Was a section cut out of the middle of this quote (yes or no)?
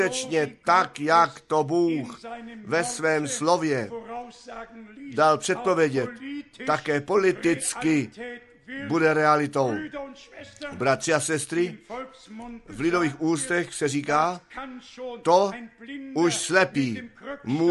no